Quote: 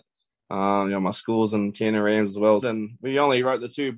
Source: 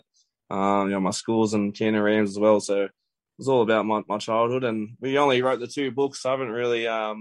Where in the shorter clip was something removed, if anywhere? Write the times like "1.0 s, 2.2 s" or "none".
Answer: 2.6 s